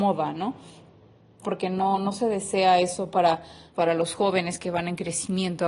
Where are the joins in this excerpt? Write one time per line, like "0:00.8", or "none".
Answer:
0:01.4
0:03.7